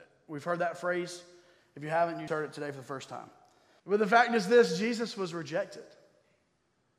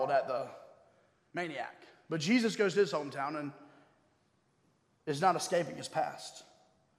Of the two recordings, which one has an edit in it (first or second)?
first